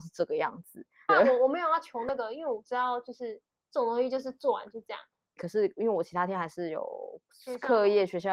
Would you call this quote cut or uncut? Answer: cut